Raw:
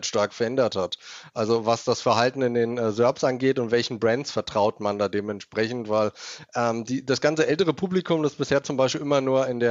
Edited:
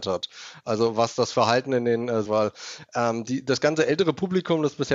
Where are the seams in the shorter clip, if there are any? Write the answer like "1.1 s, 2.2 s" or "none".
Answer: 2.2 s